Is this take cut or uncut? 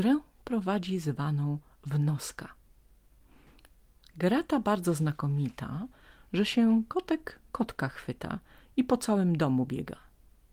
cut